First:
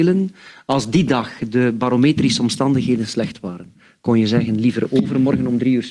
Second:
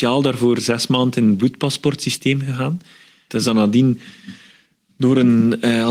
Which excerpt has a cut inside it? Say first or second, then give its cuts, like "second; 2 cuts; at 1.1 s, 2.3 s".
second; 1 cut; at 3.3 s